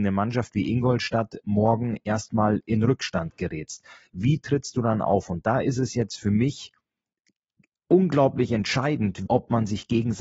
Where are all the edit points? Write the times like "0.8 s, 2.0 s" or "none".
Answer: 9.3 s